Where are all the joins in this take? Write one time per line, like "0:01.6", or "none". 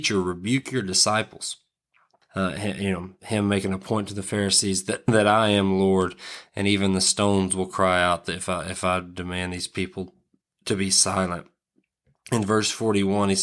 0:02.2